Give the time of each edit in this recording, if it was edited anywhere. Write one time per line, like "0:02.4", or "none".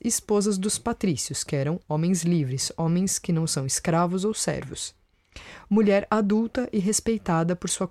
none